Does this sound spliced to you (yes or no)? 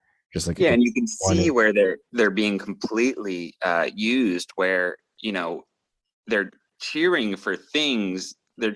no